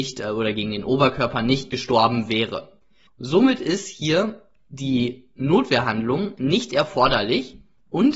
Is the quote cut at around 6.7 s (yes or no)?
no